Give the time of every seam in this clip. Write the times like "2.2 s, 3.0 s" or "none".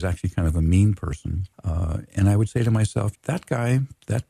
1.5 s, 3.2 s